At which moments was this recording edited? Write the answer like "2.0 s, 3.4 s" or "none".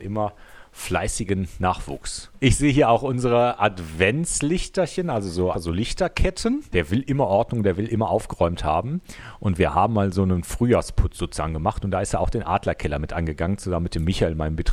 5.5 s, 6.7 s